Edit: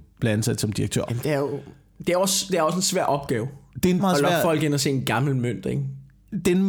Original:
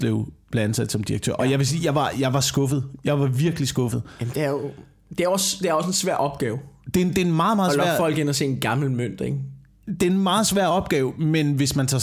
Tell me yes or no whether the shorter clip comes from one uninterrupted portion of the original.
no